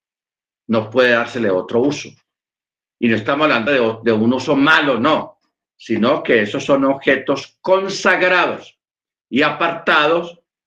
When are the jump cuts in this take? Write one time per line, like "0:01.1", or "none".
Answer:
none